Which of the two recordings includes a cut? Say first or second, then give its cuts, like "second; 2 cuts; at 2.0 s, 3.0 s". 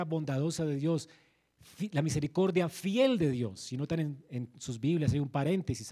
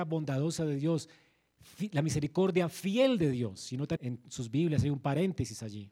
second; 1 cut; at 4.0 s